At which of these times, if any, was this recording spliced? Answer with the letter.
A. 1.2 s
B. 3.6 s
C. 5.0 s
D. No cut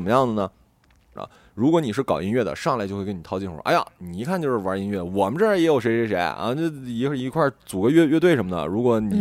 A